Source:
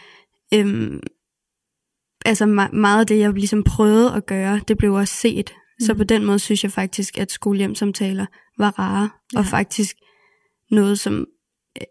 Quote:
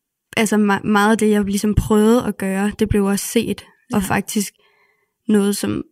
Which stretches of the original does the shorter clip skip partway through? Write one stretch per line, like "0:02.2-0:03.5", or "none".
0:05.8-0:09.3